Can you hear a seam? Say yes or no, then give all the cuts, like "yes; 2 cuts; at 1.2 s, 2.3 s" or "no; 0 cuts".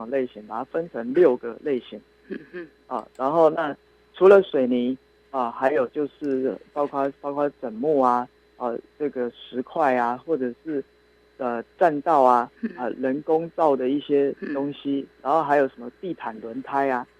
no; 0 cuts